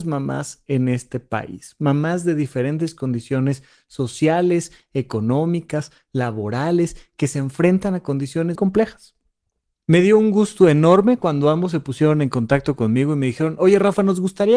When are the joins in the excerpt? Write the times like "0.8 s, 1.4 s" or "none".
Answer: 8.6 s